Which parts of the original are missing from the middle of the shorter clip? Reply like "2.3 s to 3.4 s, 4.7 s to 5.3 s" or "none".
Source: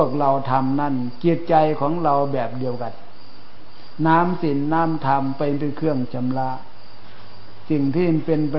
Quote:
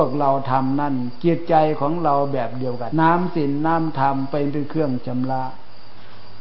2.9 s to 4.0 s